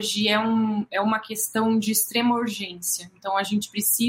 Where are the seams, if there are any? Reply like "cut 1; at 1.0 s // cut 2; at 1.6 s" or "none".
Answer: none